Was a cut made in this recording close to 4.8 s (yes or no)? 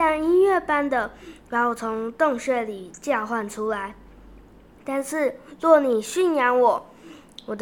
yes